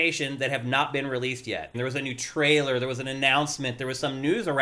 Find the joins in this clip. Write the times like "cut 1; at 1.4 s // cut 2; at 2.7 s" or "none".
cut 1; at 1.7 s